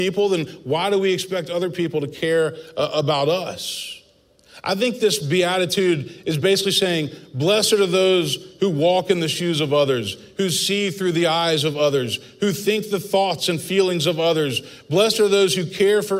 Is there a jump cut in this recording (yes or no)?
no